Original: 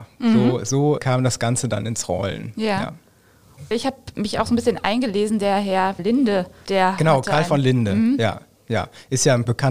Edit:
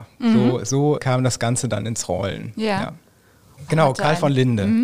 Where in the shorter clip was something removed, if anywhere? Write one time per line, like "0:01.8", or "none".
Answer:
0:03.7